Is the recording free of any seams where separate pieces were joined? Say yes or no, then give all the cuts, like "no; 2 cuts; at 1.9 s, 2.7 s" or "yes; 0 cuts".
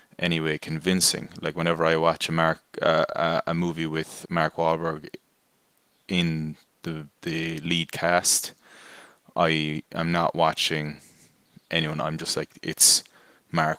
yes; 0 cuts